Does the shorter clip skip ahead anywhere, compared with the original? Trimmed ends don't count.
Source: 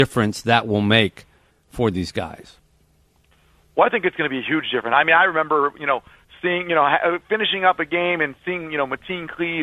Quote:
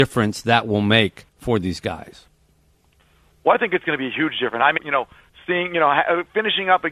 yes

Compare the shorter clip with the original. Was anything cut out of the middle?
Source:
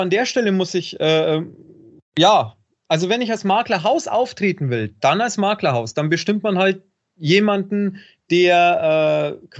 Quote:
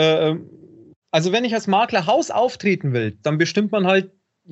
yes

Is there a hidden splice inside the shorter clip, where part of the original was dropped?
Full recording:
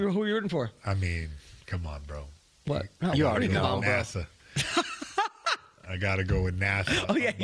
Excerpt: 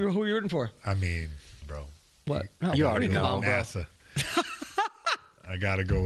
yes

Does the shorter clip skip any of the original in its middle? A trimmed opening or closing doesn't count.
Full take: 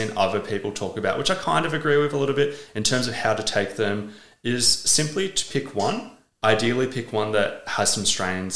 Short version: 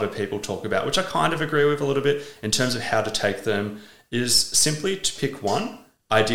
no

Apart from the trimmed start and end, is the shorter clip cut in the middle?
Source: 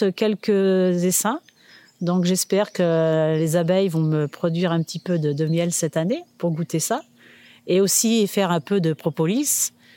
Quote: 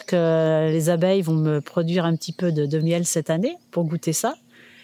no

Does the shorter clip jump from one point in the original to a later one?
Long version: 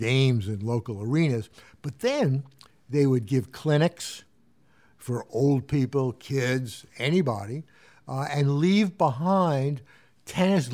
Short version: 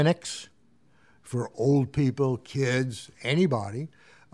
no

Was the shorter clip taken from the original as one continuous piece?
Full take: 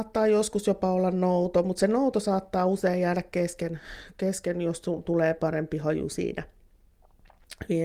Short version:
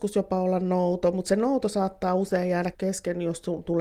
no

